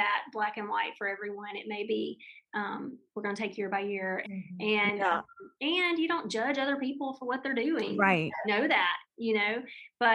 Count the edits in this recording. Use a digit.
3